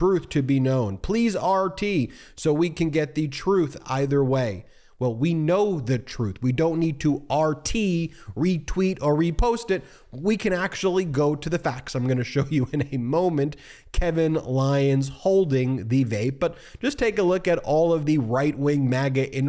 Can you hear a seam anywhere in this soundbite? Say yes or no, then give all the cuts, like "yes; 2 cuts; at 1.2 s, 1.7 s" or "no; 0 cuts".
no; 0 cuts